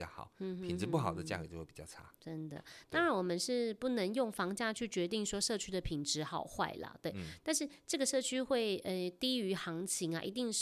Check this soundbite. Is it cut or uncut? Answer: uncut